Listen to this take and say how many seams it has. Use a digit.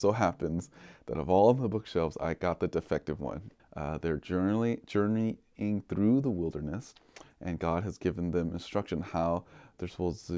1